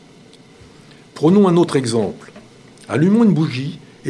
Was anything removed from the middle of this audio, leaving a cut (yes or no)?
no